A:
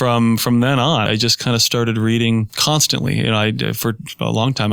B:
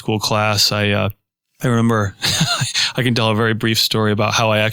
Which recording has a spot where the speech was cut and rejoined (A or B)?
A